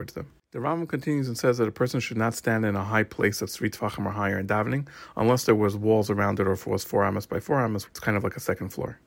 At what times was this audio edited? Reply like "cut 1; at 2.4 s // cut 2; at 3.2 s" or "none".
cut 1; at 7.9 s